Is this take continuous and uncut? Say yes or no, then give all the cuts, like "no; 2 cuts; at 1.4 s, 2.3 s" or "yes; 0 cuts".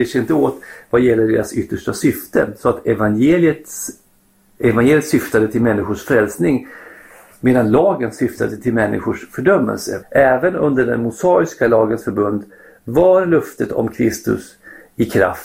no; 1 cut; at 10.0 s